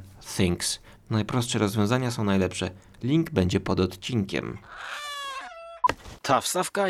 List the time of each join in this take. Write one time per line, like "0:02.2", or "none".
0:01.0

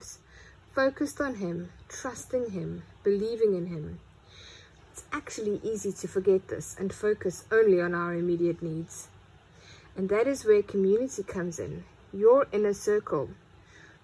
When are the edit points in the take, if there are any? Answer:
0:04.8

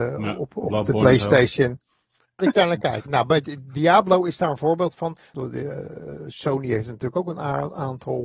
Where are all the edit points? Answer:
0:02.4
0:05.3

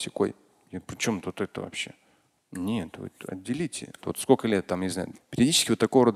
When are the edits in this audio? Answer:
0:04.0
0:05.1

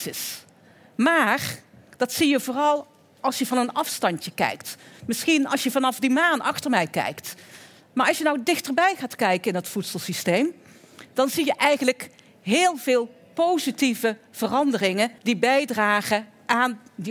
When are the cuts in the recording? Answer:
0:15.2

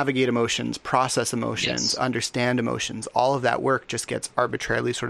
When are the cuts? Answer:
none

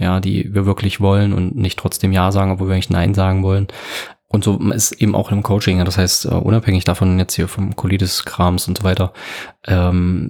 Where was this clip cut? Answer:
none

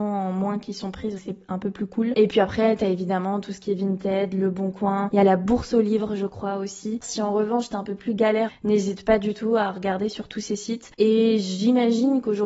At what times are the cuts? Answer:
0:01.2
0:07.0
0:08.5

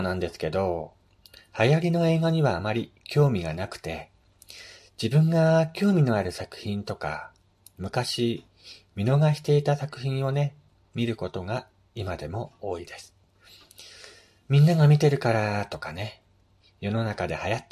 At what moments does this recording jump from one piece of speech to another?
none

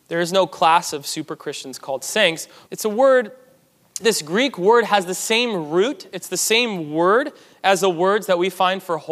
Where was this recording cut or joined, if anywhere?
0:02.7
0:04.0

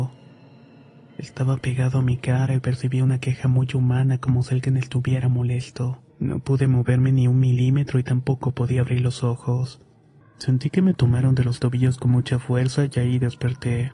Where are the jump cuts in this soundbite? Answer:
0:06.1
0:10.2

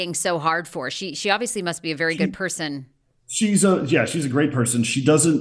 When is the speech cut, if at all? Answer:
none

